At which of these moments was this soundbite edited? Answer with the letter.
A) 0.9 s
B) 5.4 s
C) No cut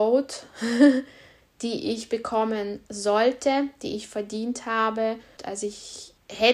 B